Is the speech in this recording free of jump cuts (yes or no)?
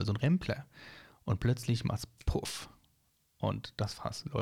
yes